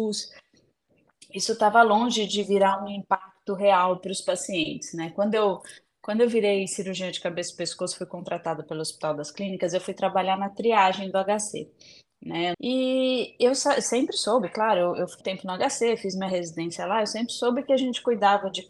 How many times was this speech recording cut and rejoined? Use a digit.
2